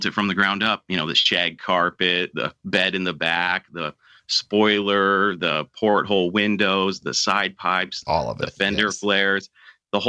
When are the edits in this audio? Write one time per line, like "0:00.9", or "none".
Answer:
0:08.1

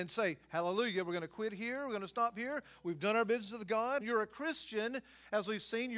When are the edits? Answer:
0:04.0

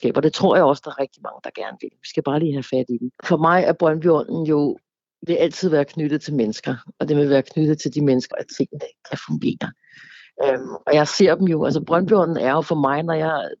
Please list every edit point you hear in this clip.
0:03.1
0:08.3

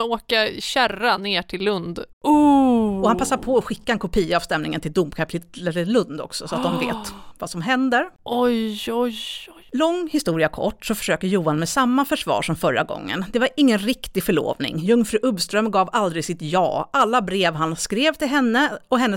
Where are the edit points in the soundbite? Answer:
0:02.1

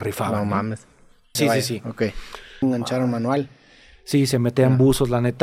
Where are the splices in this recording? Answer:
0:01.4
0:02.6

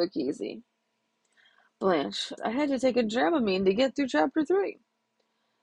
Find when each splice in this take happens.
0:02.4

